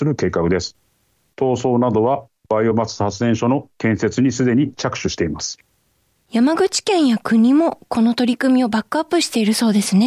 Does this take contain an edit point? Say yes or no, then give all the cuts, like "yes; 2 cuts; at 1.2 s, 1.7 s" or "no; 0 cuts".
no; 0 cuts